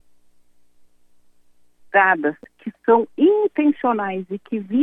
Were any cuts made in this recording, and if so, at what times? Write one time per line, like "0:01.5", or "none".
none